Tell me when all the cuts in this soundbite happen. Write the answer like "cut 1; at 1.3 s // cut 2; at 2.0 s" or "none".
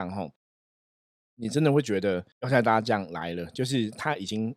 cut 1; at 2.3 s